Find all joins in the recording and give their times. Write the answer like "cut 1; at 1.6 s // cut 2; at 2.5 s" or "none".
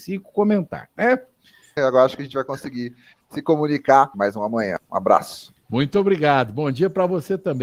cut 1; at 1.8 s // cut 2; at 4.1 s // cut 3; at 5.6 s